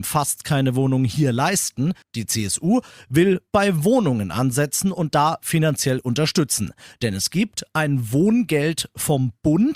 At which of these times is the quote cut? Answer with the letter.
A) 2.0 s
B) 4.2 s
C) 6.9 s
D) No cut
A